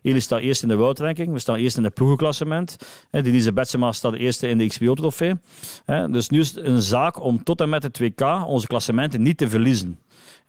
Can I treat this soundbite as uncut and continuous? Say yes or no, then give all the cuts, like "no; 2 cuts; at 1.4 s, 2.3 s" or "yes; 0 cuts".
yes; 0 cuts